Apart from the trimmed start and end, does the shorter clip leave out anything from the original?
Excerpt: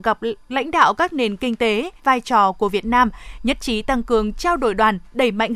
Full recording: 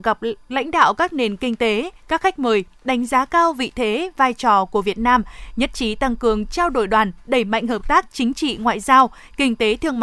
yes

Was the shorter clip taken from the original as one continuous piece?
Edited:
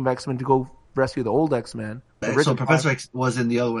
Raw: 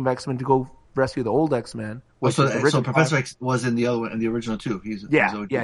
no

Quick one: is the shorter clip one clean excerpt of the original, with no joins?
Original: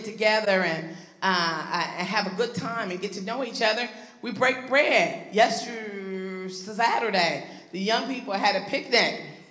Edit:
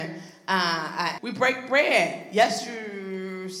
no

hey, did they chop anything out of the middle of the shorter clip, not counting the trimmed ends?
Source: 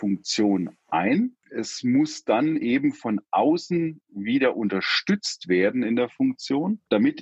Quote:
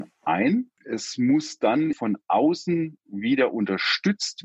yes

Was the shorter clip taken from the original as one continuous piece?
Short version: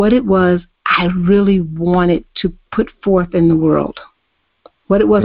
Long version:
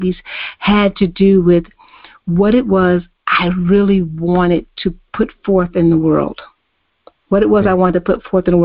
yes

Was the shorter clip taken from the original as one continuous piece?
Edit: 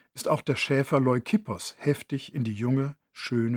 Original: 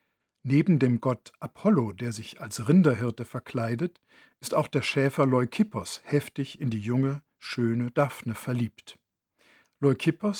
yes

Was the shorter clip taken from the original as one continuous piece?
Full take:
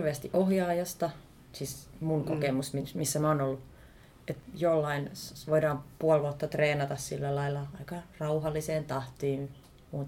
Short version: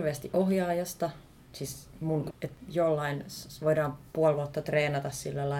no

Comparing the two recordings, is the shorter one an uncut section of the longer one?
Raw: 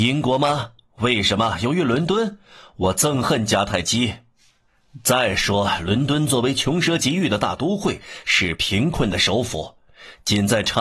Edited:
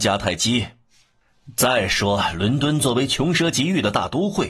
yes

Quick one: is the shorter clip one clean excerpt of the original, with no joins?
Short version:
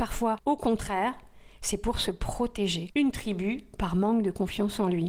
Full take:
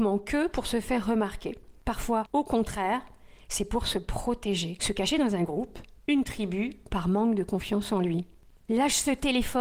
no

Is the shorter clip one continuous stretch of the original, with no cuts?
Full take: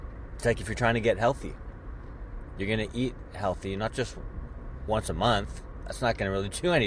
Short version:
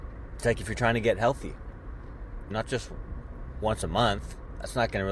no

